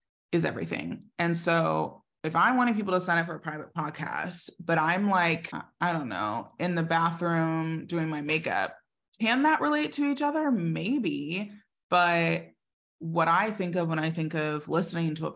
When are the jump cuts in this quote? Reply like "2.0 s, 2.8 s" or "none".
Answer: none